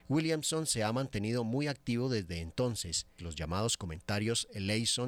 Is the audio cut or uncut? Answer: cut